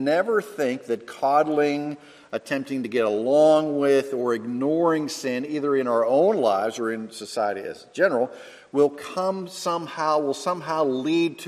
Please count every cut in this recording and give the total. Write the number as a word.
zero